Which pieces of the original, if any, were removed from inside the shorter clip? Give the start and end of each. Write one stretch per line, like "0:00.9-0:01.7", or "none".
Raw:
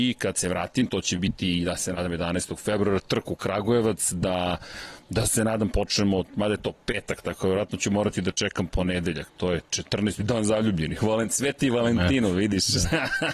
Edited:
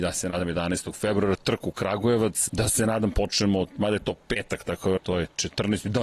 0:04.1-0:05.1
0:07.5-0:09.3